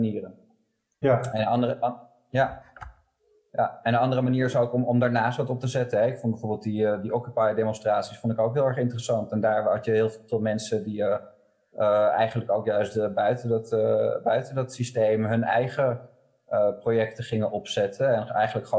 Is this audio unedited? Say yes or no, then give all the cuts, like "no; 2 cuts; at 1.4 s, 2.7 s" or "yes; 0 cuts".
yes; 0 cuts